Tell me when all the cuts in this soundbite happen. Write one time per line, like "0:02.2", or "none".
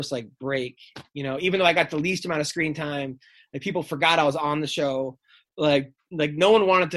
none